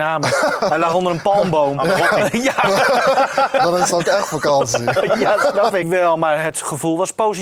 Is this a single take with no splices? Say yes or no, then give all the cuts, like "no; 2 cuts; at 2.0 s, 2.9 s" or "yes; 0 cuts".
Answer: no; 1 cut; at 5.8 s